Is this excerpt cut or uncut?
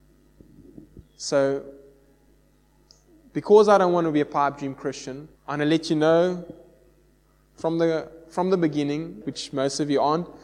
cut